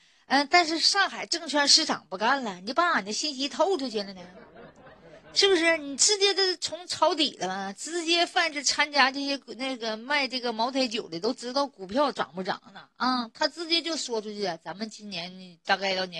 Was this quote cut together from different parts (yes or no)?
no